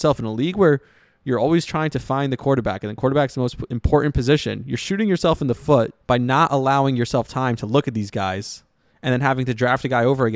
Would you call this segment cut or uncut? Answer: cut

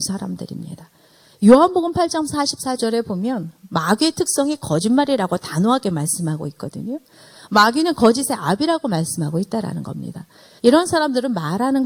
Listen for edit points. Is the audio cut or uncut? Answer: cut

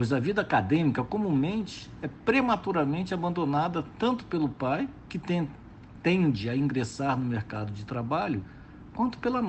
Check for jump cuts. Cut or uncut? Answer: uncut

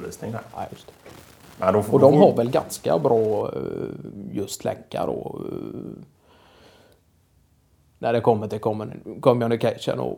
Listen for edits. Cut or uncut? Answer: uncut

